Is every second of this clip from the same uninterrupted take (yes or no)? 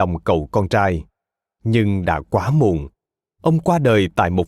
yes